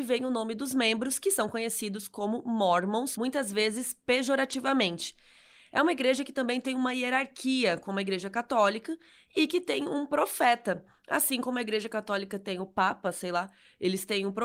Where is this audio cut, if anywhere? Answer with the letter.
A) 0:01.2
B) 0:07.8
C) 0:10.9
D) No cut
D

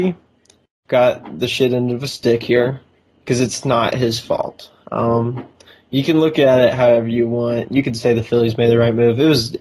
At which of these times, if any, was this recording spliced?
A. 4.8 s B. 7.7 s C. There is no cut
C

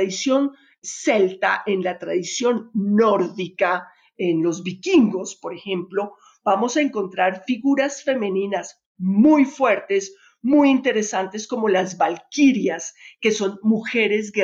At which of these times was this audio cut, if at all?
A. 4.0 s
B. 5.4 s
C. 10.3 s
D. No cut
D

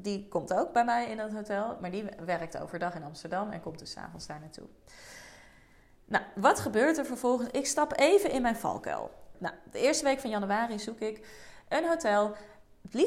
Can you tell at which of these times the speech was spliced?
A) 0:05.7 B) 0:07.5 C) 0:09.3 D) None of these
C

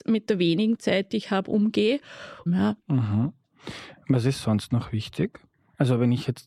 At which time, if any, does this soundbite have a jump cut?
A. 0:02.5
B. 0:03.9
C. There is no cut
A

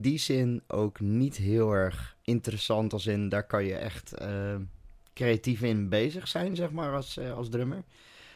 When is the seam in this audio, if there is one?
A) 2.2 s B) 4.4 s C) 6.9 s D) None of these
A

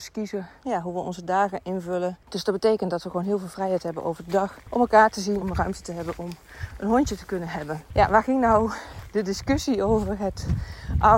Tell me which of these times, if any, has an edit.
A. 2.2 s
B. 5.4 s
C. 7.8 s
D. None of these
B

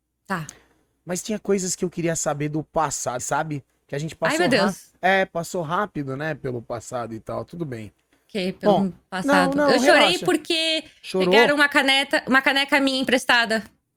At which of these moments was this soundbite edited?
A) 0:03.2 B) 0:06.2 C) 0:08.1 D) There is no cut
A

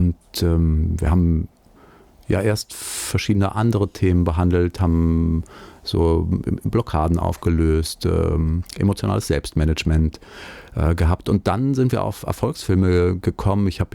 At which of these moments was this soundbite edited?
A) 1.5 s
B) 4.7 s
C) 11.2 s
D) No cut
D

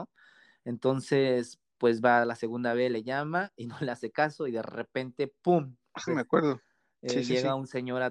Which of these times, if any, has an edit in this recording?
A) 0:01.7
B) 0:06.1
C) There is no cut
B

